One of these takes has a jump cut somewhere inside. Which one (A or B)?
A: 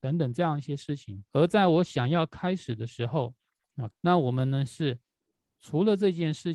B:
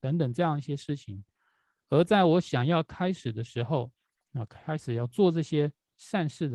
A